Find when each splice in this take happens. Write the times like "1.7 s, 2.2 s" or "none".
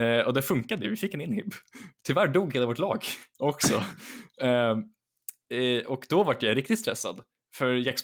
none